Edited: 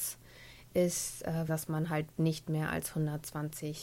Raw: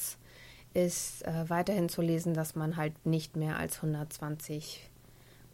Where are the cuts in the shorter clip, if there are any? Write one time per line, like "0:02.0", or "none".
0:01.5

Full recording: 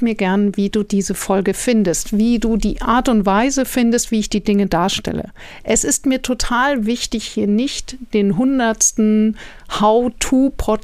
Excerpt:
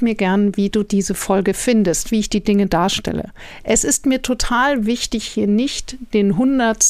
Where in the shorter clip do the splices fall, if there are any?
0:02.1

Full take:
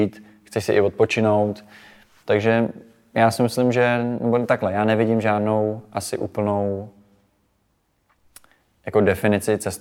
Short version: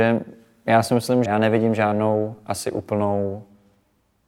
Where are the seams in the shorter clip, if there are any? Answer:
0:01.2

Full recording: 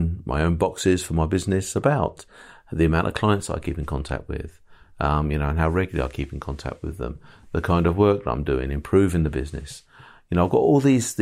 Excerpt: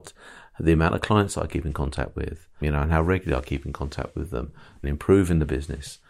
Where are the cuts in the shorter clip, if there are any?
0:02.6
0:04.8

